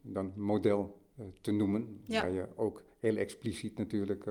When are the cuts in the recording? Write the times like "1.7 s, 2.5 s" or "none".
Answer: none